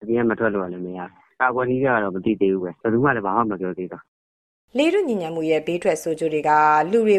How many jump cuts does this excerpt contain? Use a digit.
0